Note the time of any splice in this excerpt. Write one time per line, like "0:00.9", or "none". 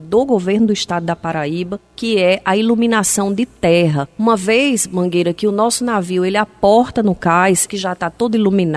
0:07.7

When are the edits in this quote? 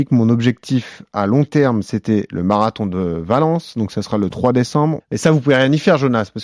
0:05.0

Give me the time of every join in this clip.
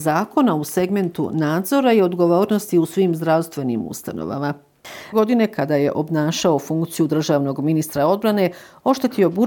0:05.1

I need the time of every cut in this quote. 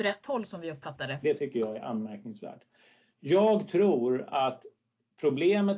0:01.2

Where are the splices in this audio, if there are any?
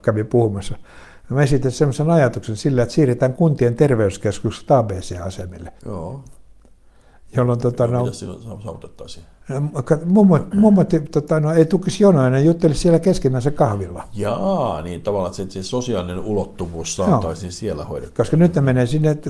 0:05.8

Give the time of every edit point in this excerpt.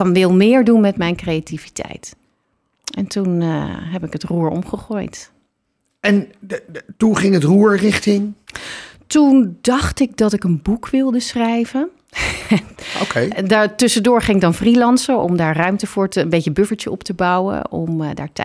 none

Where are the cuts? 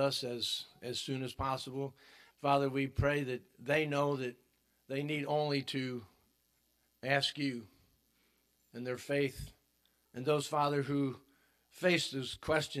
0:02.3
0:10.1

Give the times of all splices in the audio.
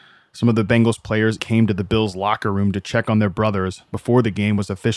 0:01.4

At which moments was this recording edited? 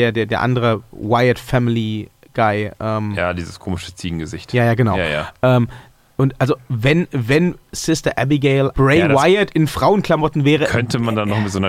0:08.7

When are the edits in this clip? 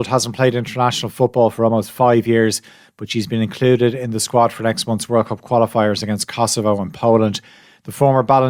none

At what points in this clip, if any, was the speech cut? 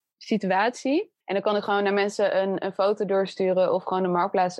0:01.2

